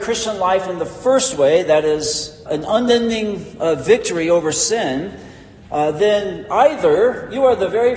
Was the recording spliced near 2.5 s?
yes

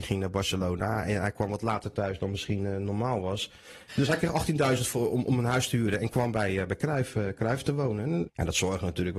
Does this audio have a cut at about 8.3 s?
yes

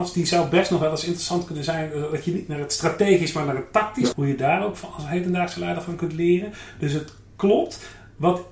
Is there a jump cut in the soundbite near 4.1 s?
yes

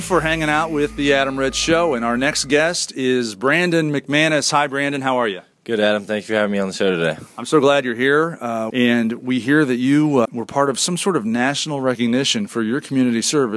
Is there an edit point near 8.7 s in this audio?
yes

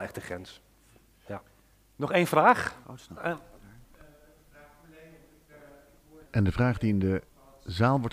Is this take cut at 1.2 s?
no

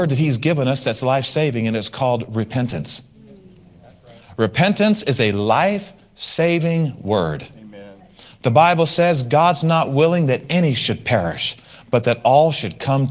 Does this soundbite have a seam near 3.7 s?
no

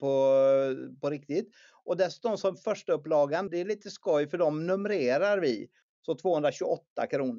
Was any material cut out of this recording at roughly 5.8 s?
yes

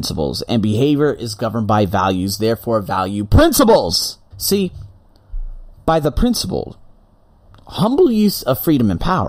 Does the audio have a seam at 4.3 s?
yes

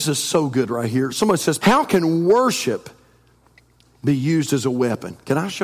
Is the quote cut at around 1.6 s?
yes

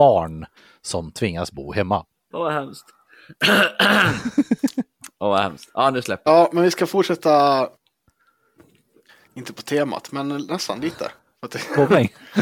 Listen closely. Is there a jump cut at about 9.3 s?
no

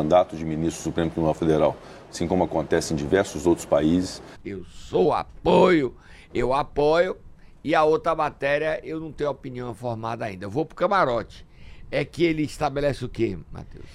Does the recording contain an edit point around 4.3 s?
yes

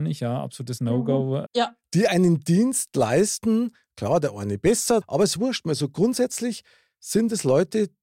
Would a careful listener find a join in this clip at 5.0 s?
yes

